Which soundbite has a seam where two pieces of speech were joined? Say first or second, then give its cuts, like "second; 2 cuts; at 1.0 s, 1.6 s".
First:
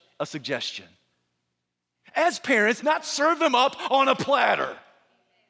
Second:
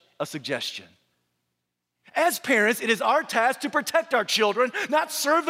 first; 1 cut; at 2.8 s